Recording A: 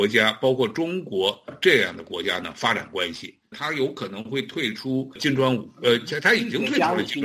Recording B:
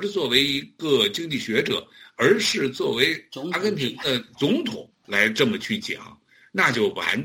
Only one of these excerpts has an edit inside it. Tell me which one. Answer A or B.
A